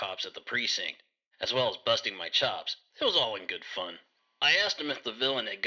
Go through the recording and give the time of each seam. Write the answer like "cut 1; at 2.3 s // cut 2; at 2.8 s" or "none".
none